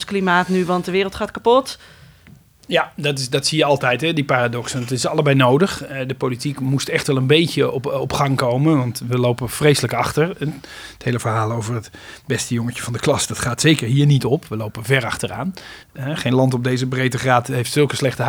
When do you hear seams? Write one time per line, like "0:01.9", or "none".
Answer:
0:15.8